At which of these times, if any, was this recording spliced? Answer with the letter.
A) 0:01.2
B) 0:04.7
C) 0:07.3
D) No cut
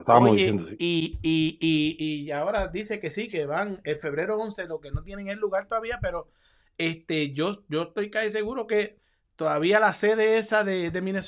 D